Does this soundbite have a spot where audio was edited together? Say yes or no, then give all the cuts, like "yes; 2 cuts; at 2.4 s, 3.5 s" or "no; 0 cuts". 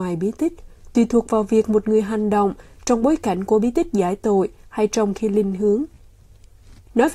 no; 0 cuts